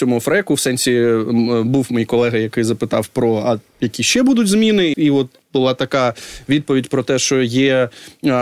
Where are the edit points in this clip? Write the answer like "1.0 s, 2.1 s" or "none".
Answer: 4.9 s